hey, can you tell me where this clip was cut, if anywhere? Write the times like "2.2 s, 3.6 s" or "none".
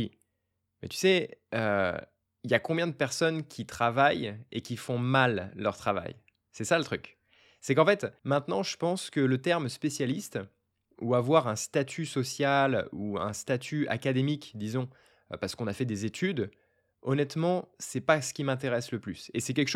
8.2 s